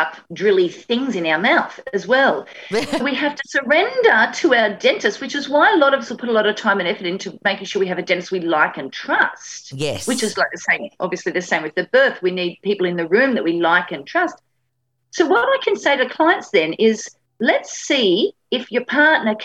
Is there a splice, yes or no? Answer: yes